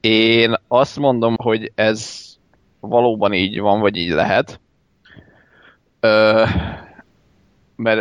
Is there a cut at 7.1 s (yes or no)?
no